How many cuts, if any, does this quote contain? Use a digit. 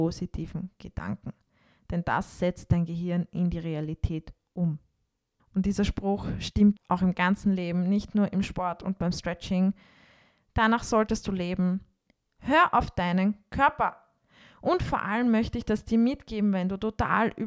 3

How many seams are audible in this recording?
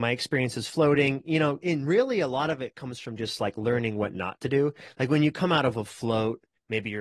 0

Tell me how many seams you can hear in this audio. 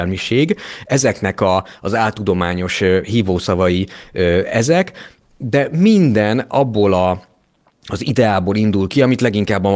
0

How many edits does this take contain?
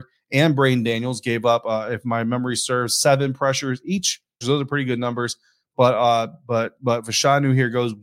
1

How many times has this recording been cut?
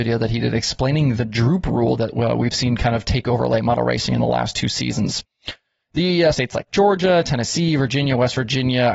1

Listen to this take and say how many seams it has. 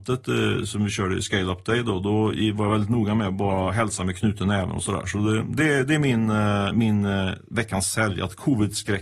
0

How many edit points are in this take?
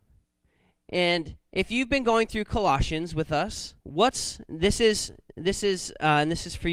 1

